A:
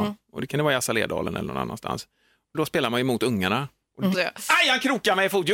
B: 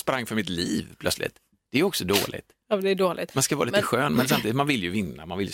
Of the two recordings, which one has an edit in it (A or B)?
A